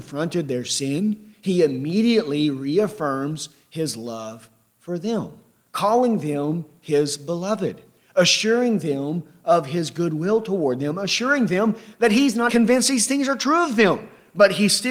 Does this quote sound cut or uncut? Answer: cut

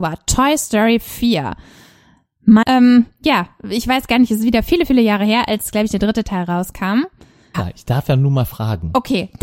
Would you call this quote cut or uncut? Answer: cut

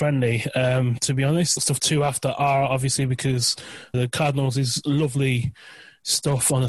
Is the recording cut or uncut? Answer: cut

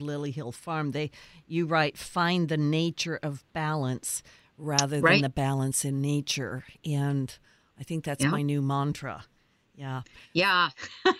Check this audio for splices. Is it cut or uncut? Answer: uncut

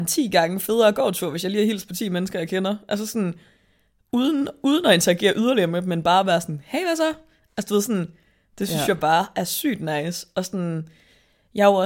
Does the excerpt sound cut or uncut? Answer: uncut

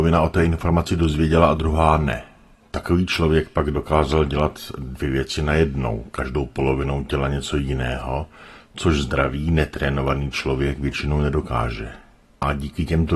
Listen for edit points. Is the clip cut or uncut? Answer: uncut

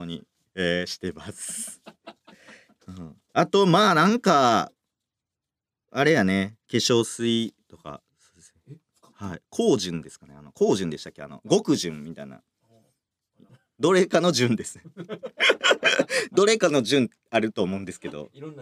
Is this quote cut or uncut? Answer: cut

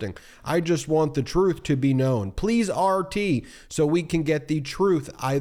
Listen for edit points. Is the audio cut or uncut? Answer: uncut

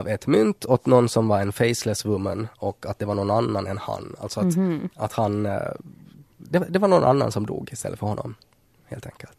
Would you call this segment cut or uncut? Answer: uncut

